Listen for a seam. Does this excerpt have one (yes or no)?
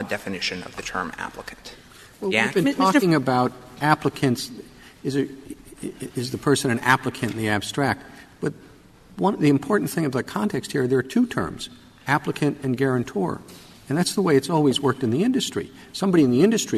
no